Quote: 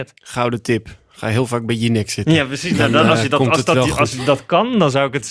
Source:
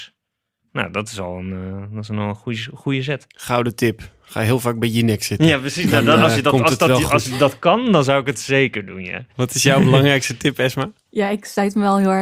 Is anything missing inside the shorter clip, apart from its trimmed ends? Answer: no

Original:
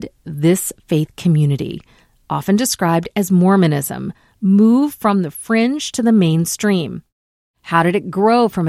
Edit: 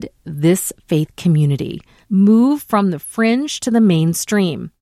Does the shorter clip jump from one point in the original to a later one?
yes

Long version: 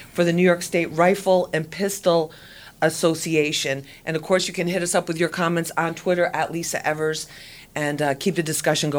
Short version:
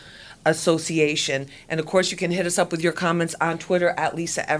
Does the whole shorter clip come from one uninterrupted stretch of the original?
yes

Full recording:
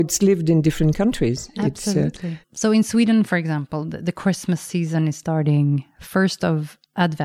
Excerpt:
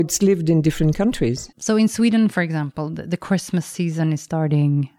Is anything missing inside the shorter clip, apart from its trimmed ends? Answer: yes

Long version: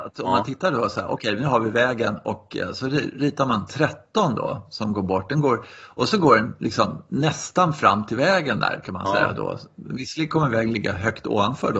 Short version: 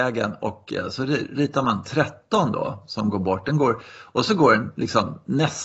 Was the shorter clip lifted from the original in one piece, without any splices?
yes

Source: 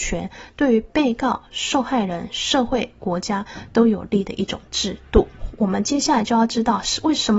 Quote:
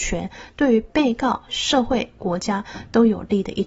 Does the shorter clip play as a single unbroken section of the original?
no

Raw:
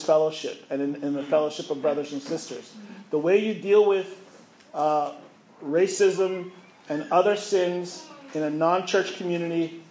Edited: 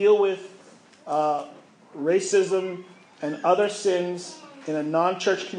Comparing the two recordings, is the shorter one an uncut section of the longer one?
yes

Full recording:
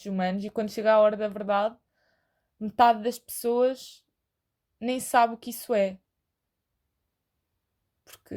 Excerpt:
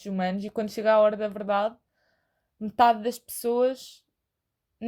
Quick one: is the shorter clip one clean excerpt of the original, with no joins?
yes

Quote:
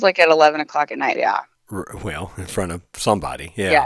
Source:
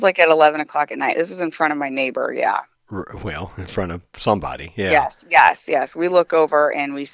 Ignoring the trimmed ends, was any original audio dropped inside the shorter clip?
yes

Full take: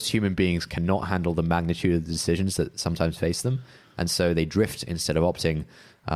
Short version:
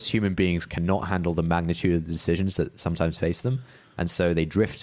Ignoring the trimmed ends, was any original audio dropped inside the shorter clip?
no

